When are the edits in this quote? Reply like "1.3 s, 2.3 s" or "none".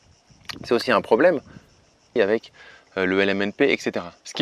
2.2 s